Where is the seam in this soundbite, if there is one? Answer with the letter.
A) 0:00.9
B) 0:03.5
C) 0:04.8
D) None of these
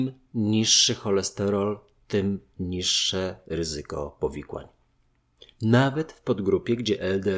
D